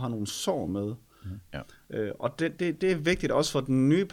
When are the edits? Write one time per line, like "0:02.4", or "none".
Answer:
0:01.5
0:02.6